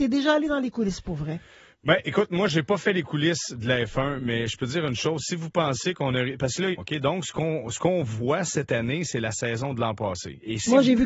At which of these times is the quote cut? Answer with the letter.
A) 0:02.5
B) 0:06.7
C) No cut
B